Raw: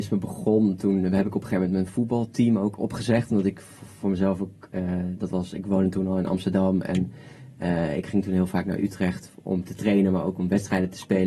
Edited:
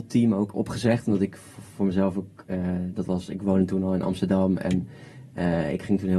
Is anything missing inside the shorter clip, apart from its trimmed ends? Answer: no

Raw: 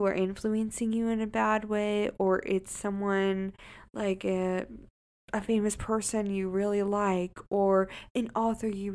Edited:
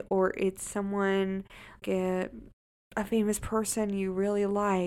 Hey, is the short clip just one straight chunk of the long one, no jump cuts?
no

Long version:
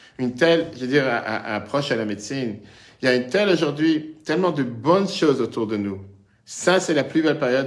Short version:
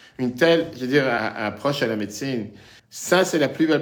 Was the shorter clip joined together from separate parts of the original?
yes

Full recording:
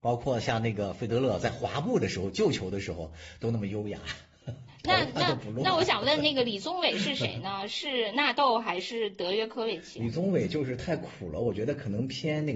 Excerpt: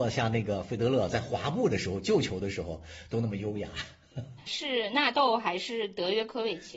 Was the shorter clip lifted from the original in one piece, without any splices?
no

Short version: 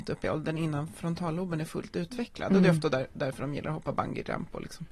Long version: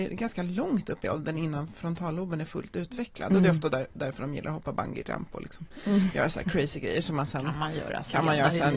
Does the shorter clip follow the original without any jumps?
yes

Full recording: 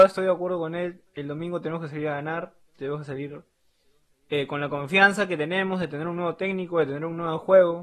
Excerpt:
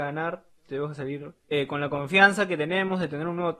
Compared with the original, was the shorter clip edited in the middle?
yes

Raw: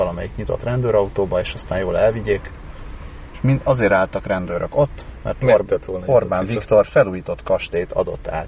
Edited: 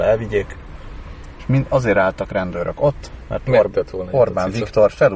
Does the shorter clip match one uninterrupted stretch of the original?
yes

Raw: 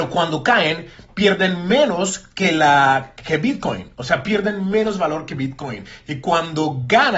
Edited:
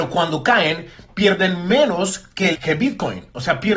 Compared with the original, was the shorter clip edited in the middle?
yes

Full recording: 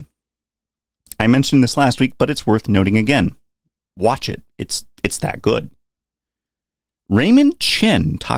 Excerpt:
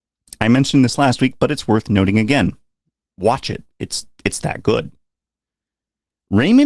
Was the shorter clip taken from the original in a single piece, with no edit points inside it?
yes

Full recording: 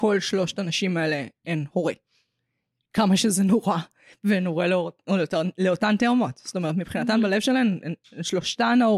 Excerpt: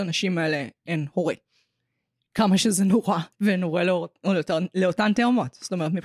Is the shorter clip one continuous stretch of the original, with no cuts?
no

